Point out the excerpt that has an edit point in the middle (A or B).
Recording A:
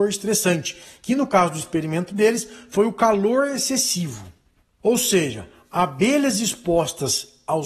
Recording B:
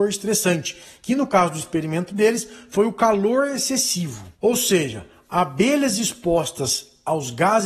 B